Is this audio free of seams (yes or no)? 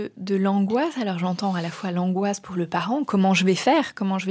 yes